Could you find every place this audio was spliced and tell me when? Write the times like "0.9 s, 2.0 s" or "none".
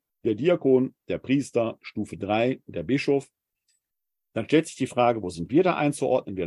1.0 s